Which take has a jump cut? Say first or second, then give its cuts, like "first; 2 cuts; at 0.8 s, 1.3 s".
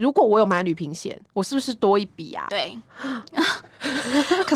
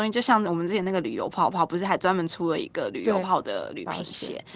second; 1 cut; at 3.2 s